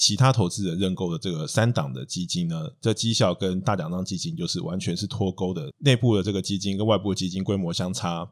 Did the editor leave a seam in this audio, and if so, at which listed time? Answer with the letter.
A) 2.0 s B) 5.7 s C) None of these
B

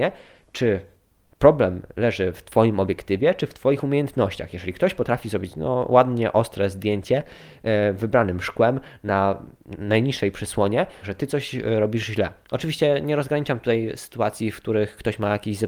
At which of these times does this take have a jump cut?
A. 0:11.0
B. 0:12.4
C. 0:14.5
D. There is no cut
A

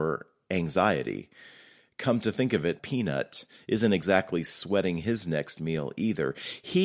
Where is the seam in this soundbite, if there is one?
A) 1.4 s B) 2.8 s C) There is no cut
B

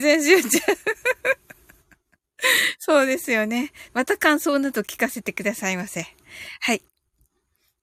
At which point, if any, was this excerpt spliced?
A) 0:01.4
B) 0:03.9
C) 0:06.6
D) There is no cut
B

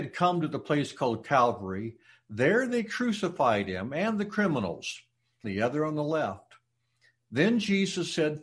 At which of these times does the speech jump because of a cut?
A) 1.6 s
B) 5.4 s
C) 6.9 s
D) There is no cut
B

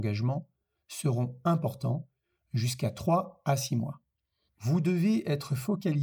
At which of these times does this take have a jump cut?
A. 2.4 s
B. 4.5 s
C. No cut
B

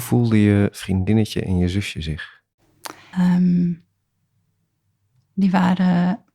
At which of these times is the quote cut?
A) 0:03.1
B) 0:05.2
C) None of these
A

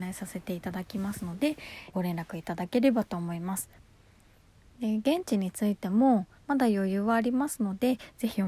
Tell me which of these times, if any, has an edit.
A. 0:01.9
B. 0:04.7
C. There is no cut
A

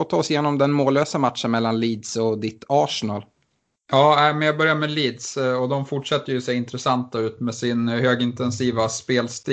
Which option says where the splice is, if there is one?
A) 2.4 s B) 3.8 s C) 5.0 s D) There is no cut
D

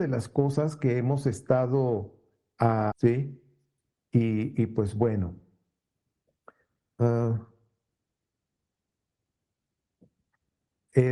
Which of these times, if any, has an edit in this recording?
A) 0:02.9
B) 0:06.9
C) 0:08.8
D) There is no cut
A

